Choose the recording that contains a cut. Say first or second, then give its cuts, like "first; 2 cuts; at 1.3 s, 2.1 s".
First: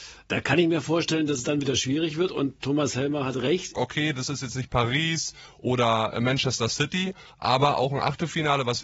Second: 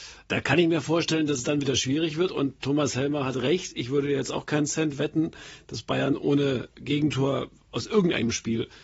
first; 1 cut; at 3.7 s